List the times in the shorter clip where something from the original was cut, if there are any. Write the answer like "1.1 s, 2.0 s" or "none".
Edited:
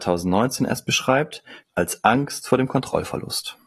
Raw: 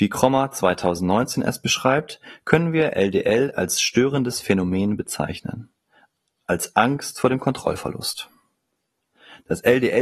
1.6 s